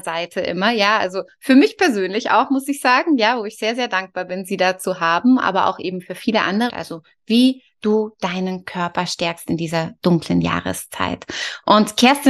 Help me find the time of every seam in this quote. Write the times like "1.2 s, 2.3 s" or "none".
6.7 s